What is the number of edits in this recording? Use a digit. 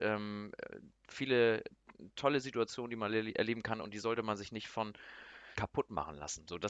1